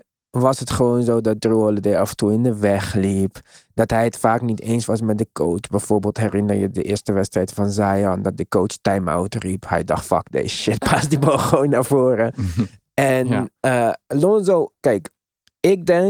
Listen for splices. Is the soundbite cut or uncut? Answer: uncut